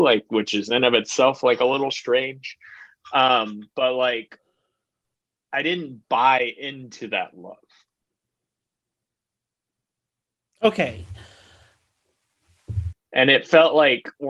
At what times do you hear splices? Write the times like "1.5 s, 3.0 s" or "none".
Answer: 12.9 s